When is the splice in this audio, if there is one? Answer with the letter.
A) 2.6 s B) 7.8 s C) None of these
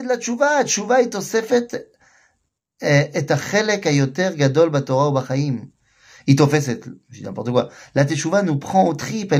C